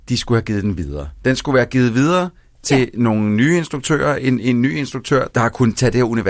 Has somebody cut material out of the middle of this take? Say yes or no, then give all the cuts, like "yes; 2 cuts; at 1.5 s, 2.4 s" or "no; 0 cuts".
yes; 1 cut; at 5.3 s